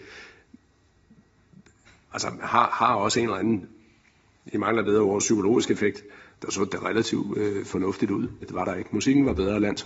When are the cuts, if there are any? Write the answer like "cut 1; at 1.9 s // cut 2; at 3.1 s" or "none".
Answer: cut 1; at 6.3 s // cut 2; at 8.4 s